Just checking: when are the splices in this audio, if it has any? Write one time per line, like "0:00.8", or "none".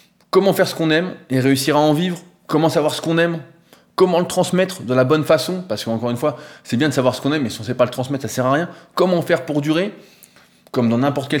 none